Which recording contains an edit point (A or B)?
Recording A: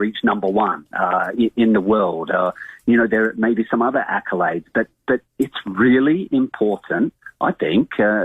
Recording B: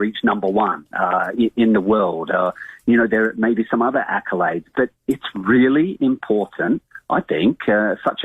B